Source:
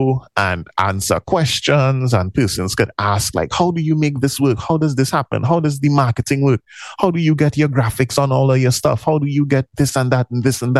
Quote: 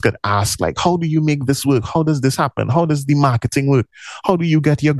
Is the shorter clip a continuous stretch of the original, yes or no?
yes